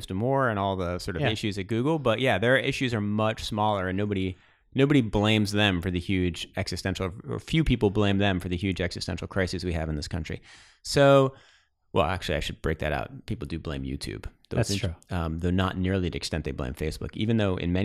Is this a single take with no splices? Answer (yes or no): yes